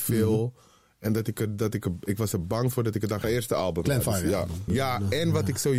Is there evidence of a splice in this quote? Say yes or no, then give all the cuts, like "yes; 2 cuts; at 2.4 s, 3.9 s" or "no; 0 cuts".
yes; 2 cuts; at 3.2 s, 4.7 s